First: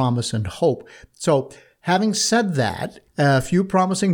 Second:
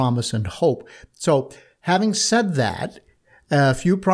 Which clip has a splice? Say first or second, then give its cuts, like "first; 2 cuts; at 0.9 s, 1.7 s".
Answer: first; 1 cut; at 3.1 s